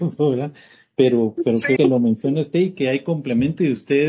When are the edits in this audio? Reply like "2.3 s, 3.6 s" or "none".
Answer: 1.8 s